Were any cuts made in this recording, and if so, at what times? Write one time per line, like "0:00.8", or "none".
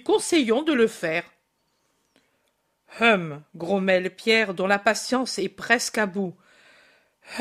none